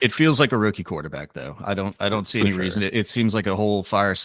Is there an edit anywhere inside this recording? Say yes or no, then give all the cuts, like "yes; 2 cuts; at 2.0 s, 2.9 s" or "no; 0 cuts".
no; 0 cuts